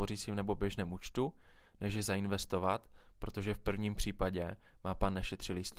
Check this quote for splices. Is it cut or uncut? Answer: uncut